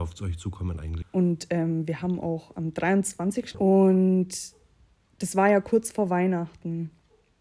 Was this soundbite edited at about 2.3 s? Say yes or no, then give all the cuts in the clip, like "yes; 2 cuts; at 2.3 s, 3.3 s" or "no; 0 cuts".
no; 2 cuts; at 1.0 s, 3.5 s